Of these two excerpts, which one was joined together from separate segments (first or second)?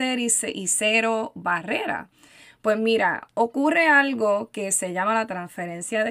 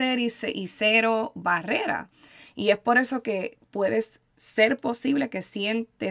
second